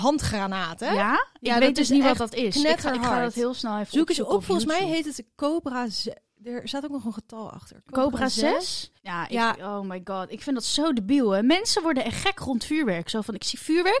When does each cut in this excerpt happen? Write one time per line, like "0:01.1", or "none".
0:09.0